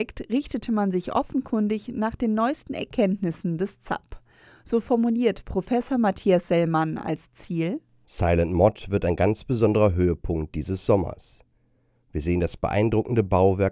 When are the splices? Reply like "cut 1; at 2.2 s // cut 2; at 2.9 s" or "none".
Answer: none